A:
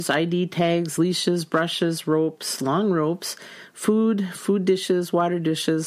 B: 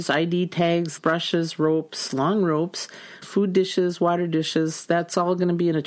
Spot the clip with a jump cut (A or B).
B